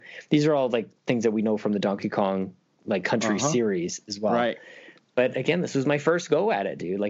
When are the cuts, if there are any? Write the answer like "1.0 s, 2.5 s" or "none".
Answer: none